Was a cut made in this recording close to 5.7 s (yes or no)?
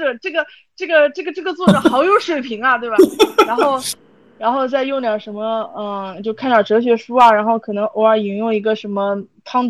no